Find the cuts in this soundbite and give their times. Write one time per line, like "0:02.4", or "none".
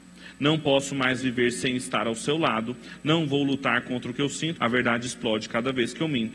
0:04.6